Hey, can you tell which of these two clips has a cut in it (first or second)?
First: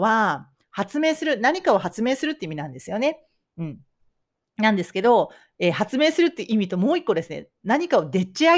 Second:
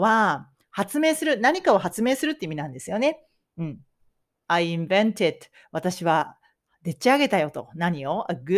second